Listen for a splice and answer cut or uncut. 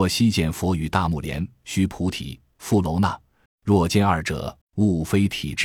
cut